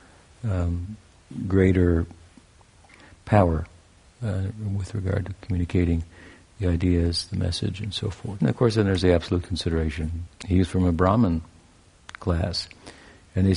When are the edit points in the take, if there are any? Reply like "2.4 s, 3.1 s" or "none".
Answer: 8.4 s, 10.3 s